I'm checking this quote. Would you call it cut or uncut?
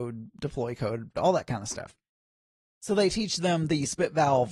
cut